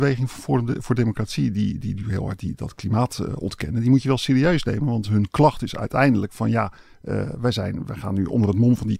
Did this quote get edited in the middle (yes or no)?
no